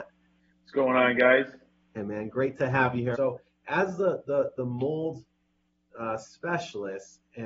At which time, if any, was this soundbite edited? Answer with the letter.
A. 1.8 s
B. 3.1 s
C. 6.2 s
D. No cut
B